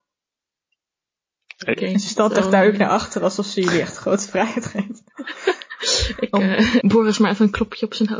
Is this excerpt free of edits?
no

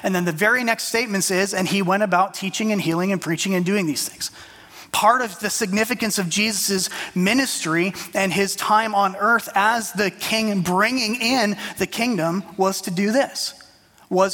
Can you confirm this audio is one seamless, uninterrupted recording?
yes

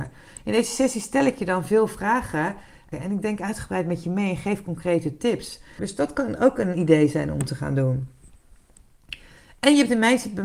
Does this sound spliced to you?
yes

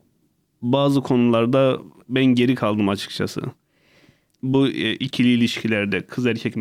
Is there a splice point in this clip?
no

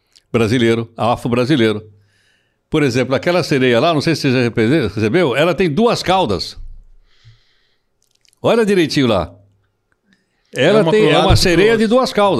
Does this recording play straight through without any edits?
yes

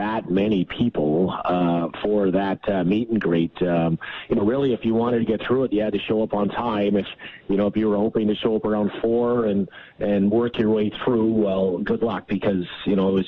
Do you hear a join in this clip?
no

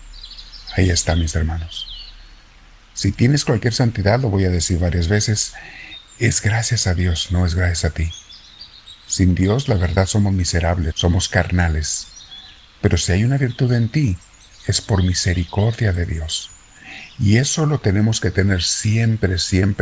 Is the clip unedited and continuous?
no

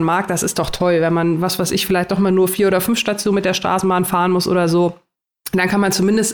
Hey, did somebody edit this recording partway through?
no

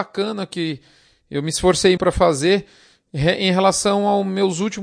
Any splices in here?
yes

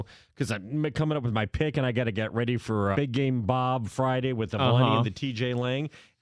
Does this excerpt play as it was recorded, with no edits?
no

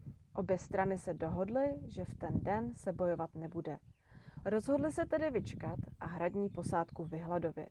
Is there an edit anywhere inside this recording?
yes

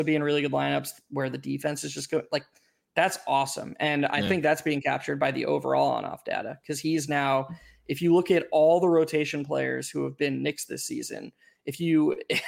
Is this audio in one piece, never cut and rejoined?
yes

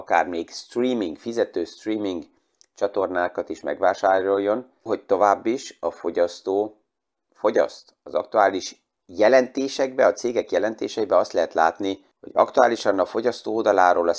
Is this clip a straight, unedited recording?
no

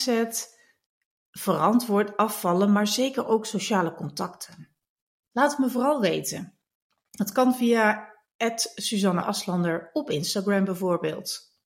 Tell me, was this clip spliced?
yes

